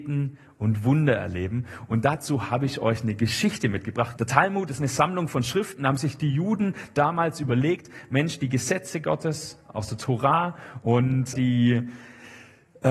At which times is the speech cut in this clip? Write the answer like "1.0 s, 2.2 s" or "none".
4.1 s, 11.3 s